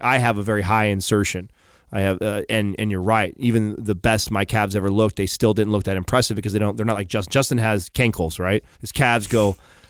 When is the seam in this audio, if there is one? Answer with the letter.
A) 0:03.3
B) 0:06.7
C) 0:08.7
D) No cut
C